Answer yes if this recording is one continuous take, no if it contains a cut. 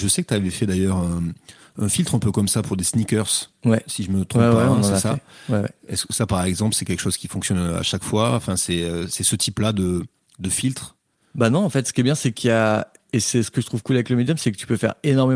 yes